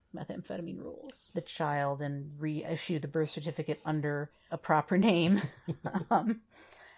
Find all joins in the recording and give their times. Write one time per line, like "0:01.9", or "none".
0:01.3
0:04.5

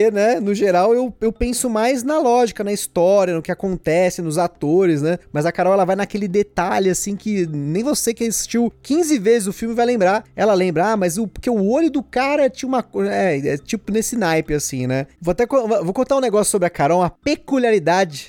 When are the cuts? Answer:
0:15.1

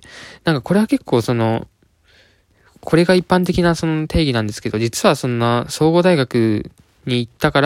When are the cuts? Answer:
none

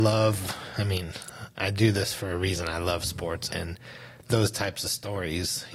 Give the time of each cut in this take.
0:03.5

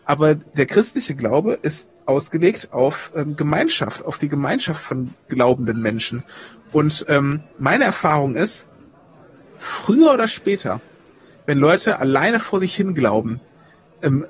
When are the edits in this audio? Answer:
none

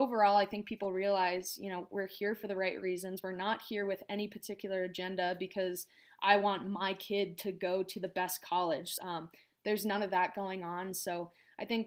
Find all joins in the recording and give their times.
0:09.0

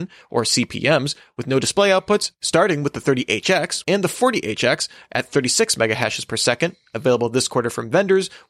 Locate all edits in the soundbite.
0:03.8

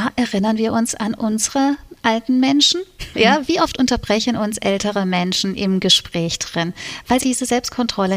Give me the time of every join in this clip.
0:03.1
0:07.2

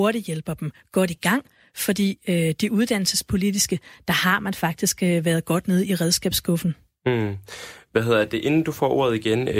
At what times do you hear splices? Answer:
none

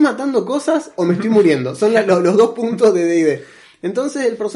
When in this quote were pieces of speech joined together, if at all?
none

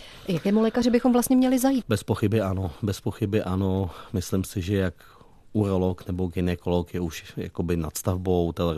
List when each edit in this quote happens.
0:01.8

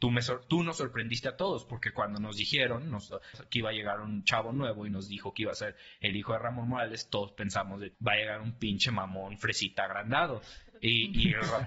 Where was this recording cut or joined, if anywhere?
0:03.3
0:07.9

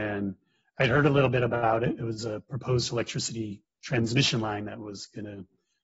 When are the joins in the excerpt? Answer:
none

